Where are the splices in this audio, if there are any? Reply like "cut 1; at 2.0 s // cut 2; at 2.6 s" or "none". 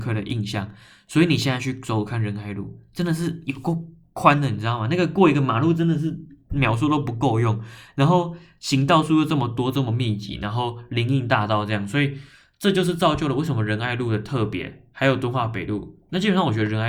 none